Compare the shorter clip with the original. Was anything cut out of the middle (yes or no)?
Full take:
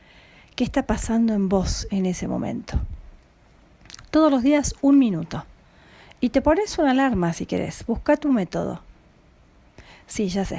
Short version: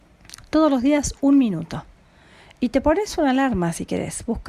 no